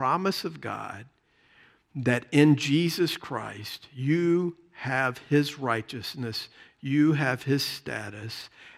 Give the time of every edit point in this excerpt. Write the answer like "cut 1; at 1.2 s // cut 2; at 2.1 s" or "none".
none